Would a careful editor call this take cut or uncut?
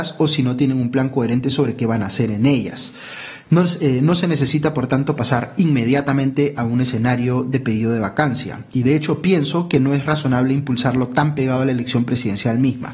uncut